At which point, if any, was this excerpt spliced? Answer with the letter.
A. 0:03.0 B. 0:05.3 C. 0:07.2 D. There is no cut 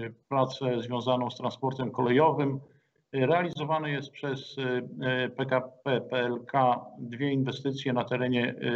A